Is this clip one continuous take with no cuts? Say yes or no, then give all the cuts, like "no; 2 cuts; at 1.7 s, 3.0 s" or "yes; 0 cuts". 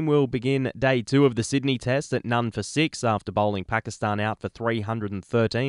yes; 0 cuts